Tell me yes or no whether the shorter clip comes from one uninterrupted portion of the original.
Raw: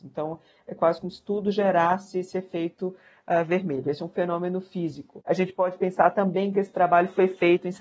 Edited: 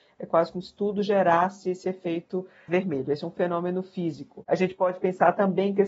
no